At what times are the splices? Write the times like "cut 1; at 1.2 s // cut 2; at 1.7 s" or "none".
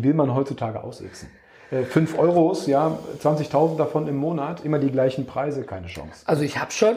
none

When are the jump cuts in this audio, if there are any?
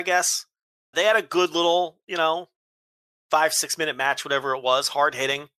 cut 1; at 0.9 s

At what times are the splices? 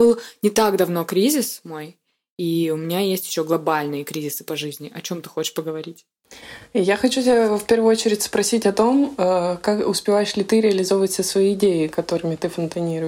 none

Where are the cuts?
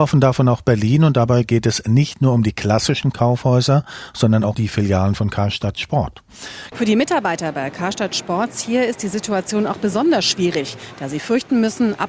cut 1; at 4.5 s // cut 2; at 6.7 s

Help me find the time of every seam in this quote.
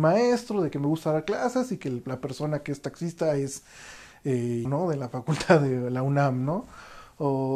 cut 1; at 4.6 s

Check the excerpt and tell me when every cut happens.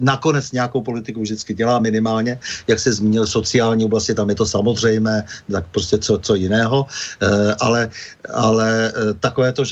none

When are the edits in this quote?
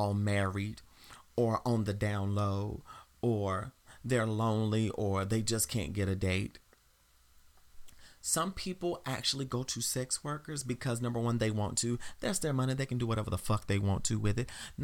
none

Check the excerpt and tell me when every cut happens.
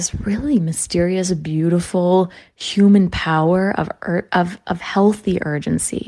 none

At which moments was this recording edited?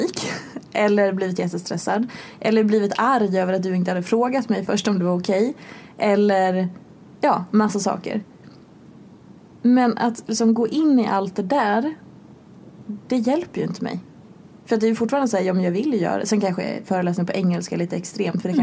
none

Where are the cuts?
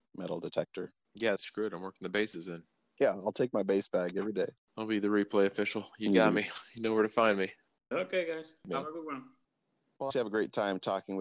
cut 1; at 1.4 s // cut 2; at 7.9 s // cut 3; at 10.1 s

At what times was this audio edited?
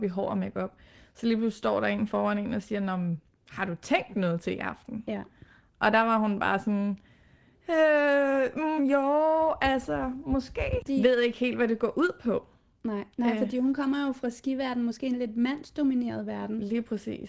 cut 1; at 8.8 s // cut 2; at 10.8 s

